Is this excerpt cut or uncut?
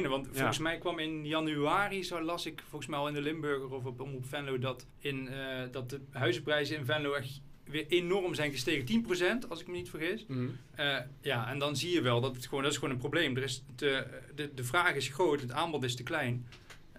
cut